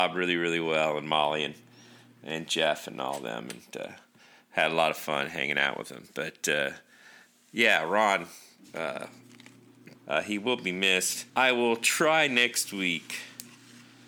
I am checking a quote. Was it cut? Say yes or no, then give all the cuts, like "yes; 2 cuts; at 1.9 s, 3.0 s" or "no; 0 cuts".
yes; 2 cuts; at 9.9 s, 11.3 s